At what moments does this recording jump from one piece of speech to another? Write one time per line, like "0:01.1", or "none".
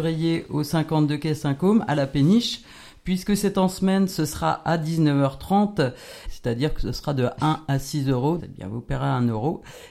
0:06.3
0:08.4